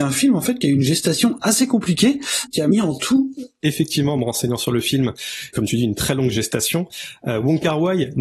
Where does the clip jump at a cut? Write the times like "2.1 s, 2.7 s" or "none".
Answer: 3.6 s, 5.5 s